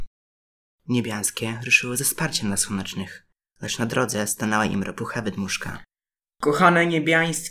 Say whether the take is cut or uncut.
uncut